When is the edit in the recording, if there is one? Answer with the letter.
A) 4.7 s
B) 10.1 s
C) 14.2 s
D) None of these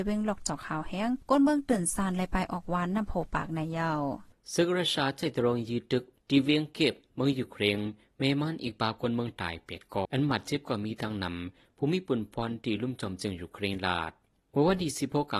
B